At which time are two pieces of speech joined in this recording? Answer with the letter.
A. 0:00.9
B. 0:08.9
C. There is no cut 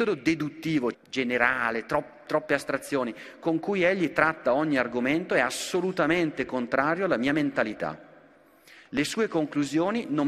A